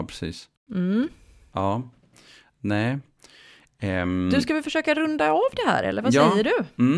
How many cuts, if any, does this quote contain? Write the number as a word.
zero